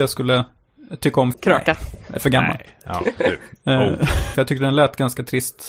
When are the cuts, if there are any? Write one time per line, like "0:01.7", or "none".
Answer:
0:01.3
0:04.3